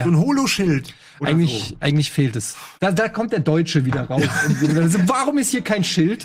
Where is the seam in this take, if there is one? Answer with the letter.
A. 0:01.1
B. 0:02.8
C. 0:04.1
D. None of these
B